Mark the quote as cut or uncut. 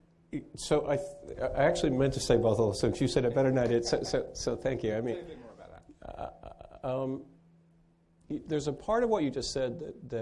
uncut